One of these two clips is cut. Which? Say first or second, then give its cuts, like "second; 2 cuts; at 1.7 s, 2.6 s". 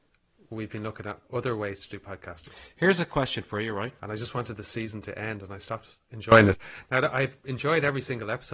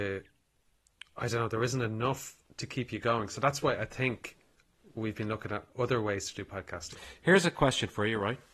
first; 1 cut; at 4.0 s